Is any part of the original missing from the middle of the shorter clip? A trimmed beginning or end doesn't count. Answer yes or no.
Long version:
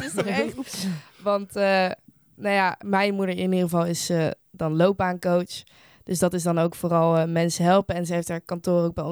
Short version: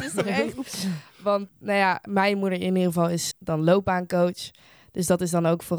yes